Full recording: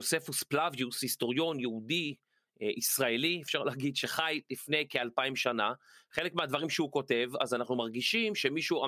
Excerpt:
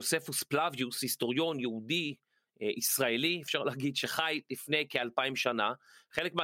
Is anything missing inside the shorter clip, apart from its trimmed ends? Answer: no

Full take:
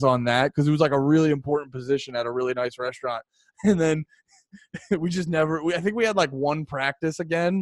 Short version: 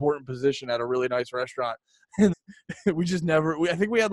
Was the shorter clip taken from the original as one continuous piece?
no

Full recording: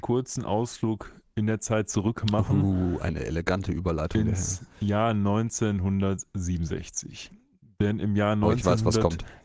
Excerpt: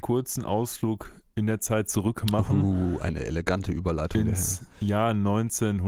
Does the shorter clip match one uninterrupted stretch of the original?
yes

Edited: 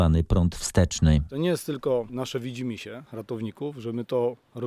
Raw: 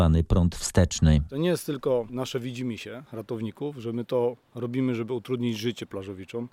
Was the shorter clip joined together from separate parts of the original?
no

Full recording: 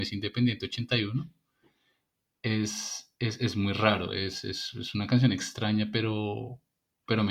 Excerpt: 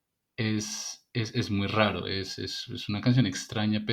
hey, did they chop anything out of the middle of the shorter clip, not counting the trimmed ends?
no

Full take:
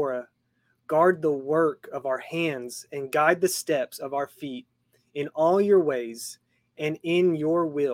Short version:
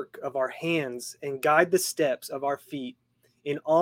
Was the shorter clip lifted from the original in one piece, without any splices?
yes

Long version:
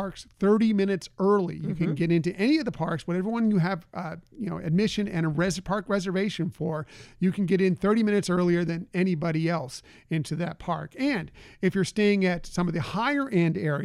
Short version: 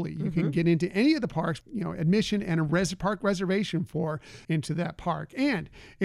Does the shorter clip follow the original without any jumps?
no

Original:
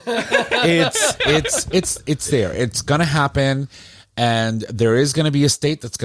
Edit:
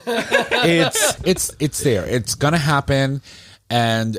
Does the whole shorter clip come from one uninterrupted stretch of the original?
no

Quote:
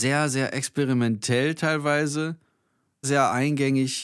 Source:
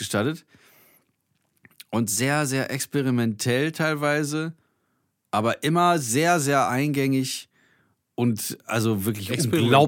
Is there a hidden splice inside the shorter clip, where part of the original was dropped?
yes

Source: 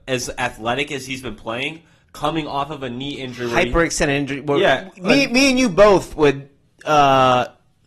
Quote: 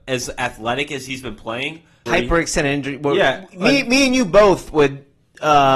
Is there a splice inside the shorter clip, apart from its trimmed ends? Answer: yes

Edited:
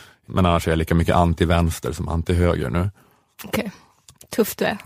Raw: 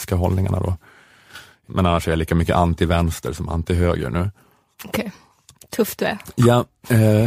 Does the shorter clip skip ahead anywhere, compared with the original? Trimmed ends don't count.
no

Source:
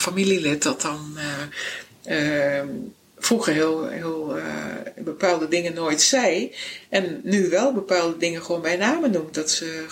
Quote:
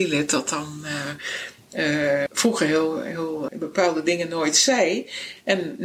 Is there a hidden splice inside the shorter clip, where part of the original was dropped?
yes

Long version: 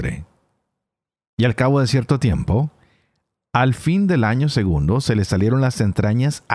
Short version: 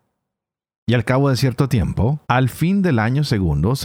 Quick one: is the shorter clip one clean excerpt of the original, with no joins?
no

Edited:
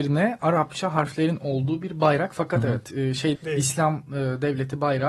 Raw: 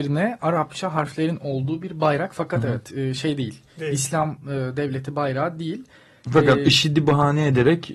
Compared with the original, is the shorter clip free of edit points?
no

